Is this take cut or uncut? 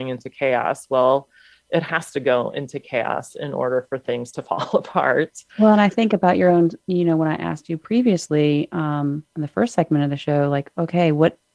uncut